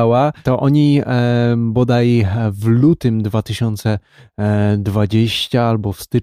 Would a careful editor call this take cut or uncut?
uncut